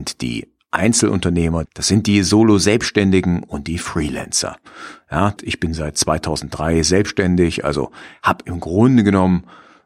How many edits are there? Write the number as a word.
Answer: two